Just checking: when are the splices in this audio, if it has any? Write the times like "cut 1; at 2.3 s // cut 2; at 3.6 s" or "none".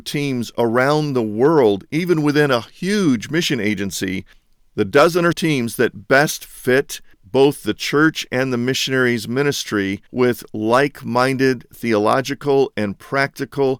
cut 1; at 5.3 s // cut 2; at 10.1 s